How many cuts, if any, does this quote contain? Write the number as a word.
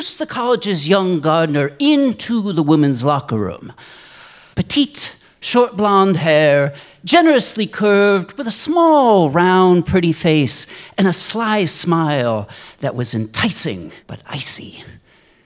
two